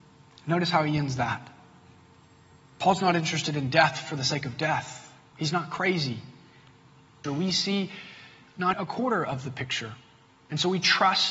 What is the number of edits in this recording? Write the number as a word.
two